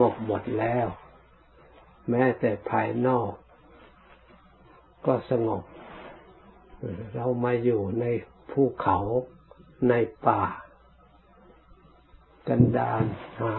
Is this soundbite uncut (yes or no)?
yes